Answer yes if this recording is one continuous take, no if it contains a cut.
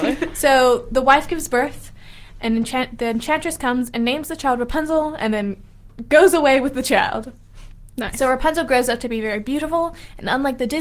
yes